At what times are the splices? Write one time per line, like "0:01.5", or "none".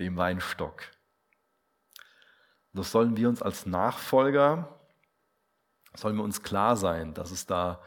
none